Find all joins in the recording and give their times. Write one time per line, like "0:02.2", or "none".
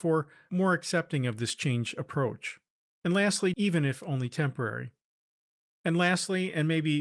0:03.5
0:05.7

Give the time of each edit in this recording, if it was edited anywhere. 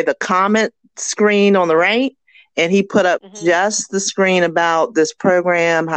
none

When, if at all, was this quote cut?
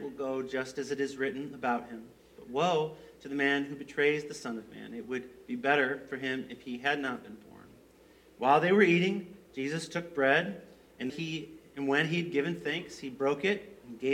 0:11.1

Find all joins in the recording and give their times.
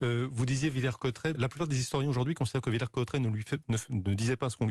0:01.3

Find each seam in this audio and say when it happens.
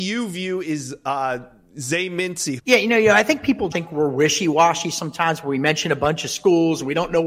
0:02.6
0:03.7

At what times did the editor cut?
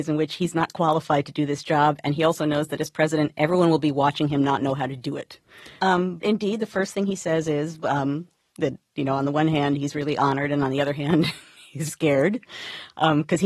0:05.8
0:11.9

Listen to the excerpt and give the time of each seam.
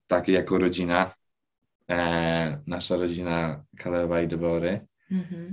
none

